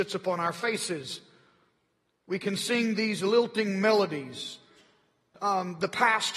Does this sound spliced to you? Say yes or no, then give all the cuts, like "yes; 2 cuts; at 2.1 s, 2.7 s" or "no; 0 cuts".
yes; 1 cut; at 5.3 s